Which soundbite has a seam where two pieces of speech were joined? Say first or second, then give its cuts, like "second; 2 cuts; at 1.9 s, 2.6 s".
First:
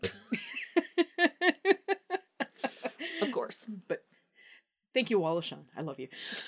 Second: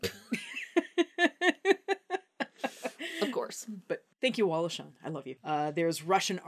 second; 2 cuts; at 4.1 s, 5.4 s